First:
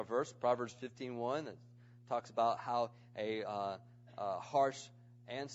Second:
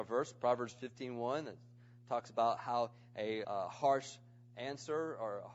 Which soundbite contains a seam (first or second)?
second